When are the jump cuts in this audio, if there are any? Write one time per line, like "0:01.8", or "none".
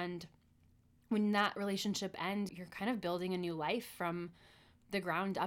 0:02.5